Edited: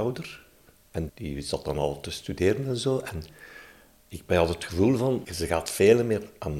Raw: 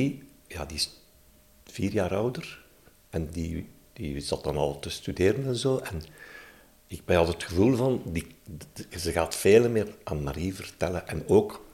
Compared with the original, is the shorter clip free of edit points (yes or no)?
no